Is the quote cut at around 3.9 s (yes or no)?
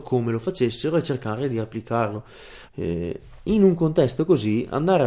no